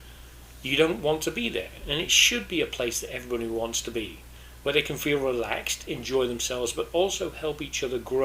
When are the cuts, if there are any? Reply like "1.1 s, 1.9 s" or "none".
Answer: none